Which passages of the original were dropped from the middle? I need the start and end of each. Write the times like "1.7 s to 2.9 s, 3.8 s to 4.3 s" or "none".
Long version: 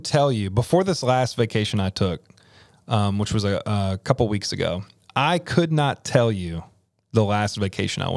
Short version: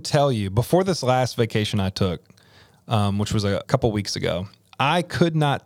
3.6 s to 4.0 s